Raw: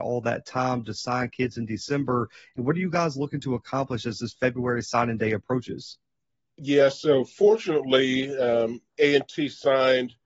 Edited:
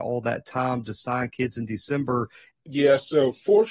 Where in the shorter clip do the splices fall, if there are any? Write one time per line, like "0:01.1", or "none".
0:02.5

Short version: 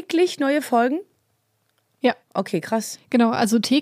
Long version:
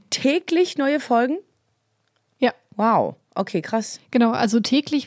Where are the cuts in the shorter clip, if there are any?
0:02.2

